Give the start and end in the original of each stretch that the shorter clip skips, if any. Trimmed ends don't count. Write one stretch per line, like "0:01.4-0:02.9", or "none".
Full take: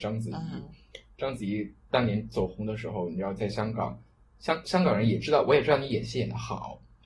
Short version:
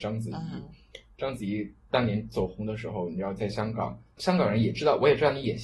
0:04.2-0:04.6